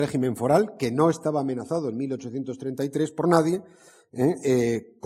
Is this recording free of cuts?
yes; 0 cuts

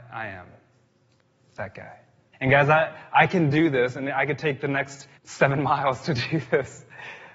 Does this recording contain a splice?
yes; 2 cuts; at 2.3 s, 5.2 s

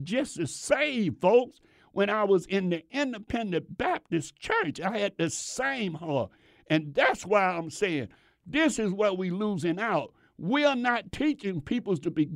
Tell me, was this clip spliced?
no; 0 cuts

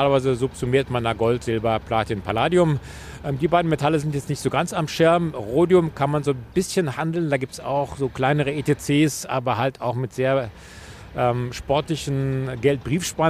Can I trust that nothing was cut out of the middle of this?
yes; 0 cuts

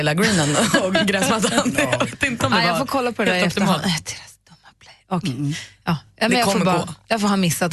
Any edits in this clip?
no; 0 cuts

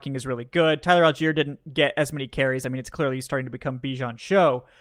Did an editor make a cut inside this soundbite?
no; 0 cuts

